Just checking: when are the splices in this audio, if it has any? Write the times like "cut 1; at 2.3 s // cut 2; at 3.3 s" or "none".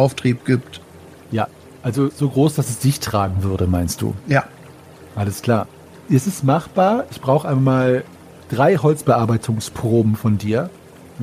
none

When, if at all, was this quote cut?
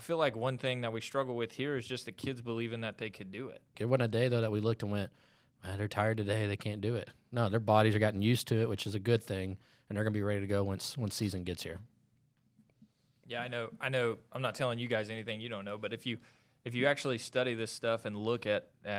cut 1; at 3.7 s

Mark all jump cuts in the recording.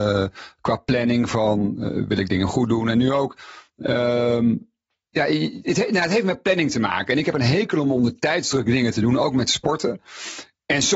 none

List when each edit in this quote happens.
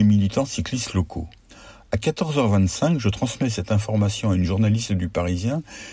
none

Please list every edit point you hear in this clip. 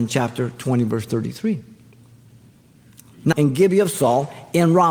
cut 1; at 3.3 s

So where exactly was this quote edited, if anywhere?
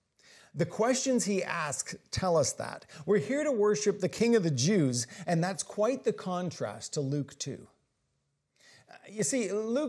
cut 1; at 5.2 s

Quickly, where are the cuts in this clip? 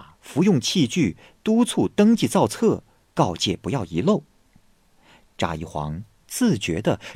none

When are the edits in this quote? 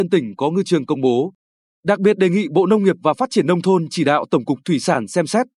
none

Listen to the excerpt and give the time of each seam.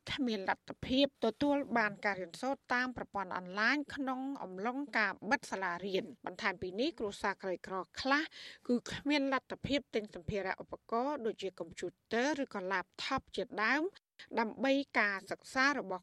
cut 1; at 1.1 s // cut 2; at 6.2 s

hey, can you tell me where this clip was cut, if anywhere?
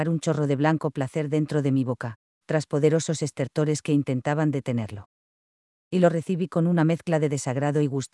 none

